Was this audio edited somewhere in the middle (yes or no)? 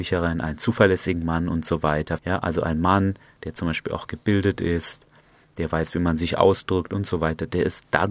yes